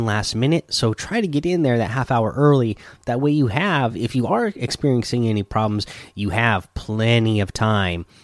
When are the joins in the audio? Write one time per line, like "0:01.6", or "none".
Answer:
none